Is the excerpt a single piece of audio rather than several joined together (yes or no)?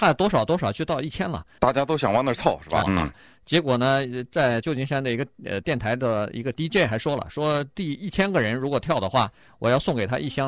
no